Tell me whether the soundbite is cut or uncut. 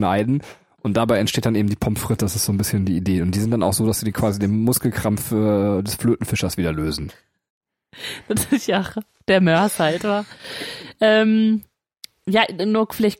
cut